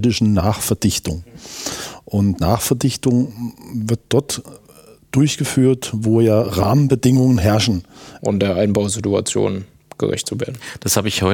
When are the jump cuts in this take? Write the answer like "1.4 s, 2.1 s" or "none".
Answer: 8.2 s